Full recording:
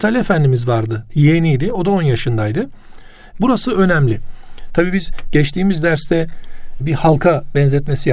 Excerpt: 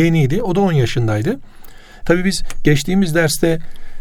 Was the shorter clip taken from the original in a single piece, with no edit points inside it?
no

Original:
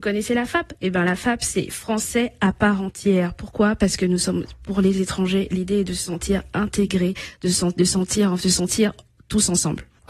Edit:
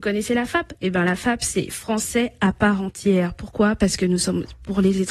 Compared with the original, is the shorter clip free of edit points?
yes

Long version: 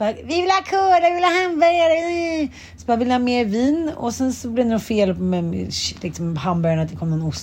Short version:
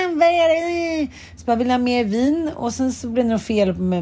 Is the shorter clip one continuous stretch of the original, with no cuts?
yes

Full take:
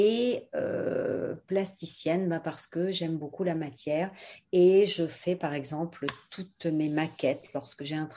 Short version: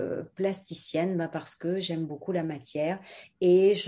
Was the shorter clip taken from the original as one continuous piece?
yes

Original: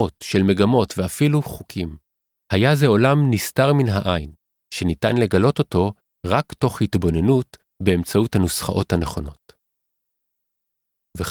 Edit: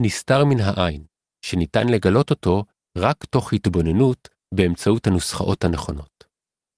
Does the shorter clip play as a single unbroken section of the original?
yes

